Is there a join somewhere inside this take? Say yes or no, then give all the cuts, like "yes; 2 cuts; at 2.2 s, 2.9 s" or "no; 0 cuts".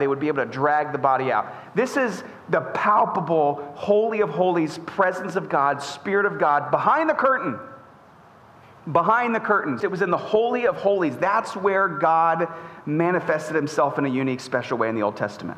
yes; 1 cut; at 9.8 s